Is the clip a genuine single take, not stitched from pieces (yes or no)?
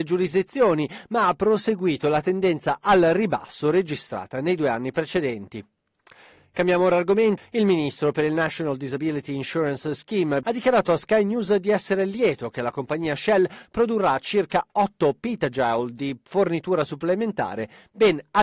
no